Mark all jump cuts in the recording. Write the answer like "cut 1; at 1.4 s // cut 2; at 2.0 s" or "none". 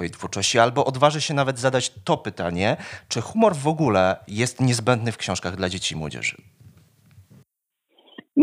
none